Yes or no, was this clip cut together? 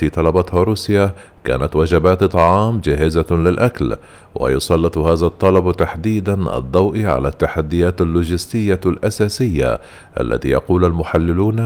no